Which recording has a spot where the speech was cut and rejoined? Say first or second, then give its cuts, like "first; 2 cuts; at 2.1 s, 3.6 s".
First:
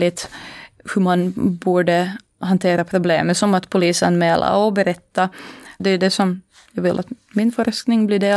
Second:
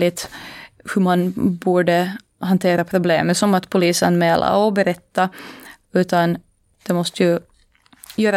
first; 1 cut; at 5.8 s